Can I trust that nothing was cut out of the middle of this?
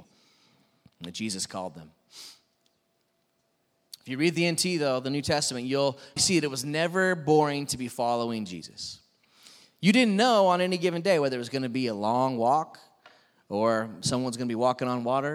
no; 1 cut; at 6.2 s

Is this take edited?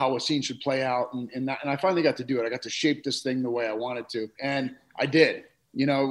yes; 1 cut; at 4.4 s

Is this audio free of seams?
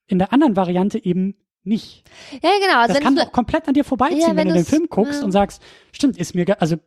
yes; 0 cuts

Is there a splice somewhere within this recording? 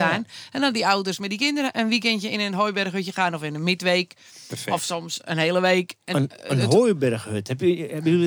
no; 0 cuts

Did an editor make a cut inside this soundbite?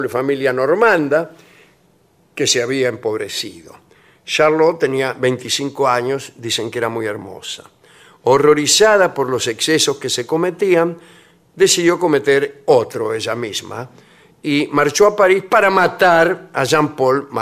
no; 0 cuts

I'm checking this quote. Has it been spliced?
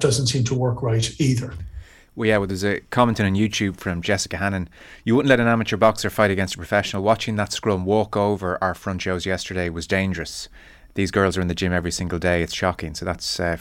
no; 0 cuts

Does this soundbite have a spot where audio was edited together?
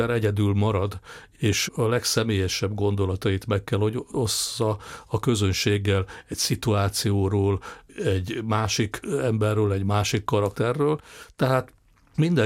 no; 0 cuts

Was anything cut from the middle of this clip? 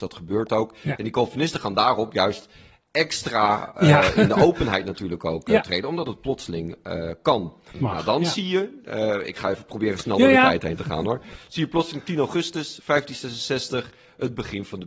no; 0 cuts

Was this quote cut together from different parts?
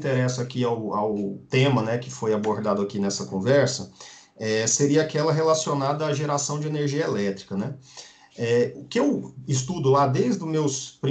no; 0 cuts

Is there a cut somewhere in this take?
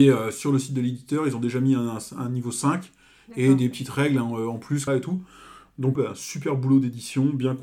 yes; 2 cuts; at 4.9 s, 6.0 s

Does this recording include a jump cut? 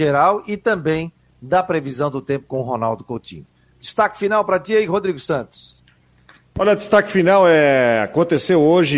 no; 0 cuts

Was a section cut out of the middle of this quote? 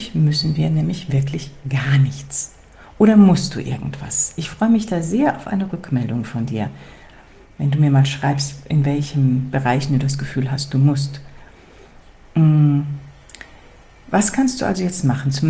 no; 0 cuts

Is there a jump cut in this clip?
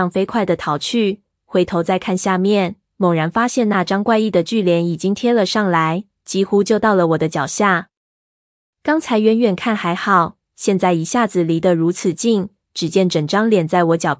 yes; 1 cut; at 1.4 s

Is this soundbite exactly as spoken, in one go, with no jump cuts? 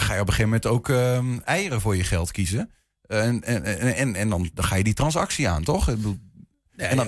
yes; 0 cuts

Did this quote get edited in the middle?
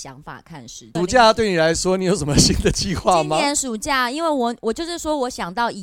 yes; 1 cut; at 0.9 s

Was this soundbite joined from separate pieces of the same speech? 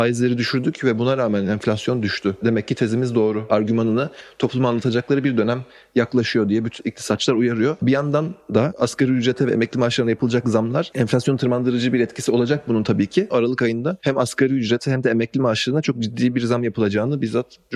yes; 2 cuts; at 7.8 s, 13.3 s

